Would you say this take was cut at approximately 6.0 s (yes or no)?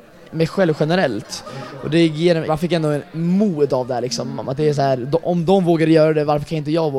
no